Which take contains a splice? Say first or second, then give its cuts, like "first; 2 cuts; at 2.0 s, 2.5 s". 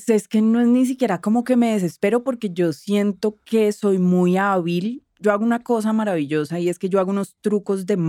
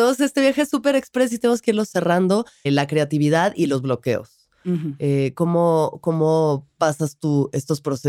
second; 1 cut; at 2.7 s